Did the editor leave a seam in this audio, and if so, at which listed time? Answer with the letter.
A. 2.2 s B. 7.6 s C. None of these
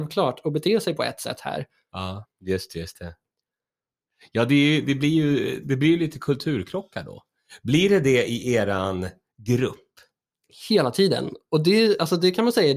A